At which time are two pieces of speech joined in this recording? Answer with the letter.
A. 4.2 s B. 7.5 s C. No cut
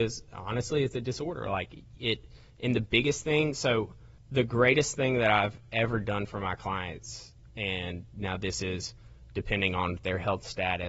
A